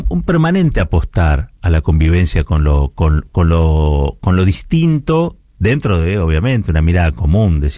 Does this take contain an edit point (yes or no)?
no